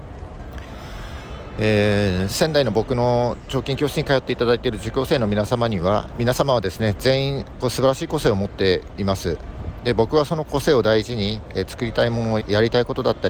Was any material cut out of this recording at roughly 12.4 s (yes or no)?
yes